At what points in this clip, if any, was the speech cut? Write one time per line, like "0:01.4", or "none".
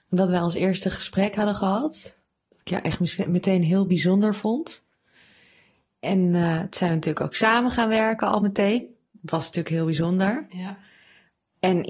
none

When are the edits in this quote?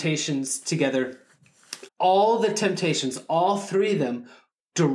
0:01.9

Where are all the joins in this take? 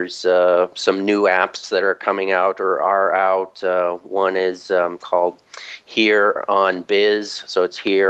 none

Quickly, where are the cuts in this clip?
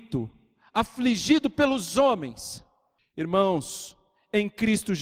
0:03.0

